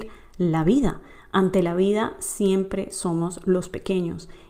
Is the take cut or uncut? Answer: uncut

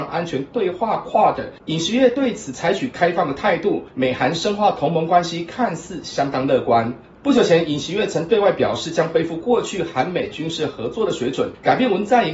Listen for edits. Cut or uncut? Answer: cut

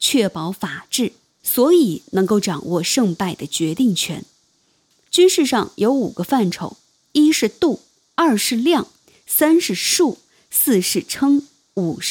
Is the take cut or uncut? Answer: uncut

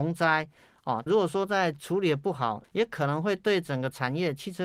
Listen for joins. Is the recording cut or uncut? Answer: cut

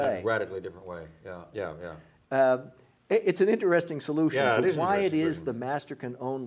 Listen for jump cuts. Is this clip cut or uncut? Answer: cut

